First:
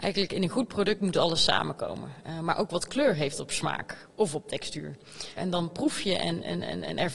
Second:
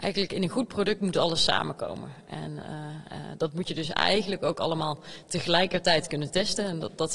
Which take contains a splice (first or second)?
first